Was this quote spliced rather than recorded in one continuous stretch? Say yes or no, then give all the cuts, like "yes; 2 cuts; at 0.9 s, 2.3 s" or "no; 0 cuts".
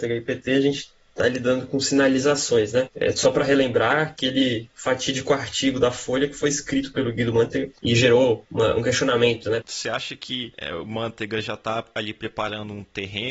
yes; 2 cuts; at 2.9 s, 9.6 s